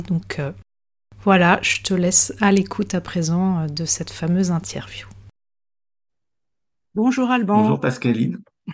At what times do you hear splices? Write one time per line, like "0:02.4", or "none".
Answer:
none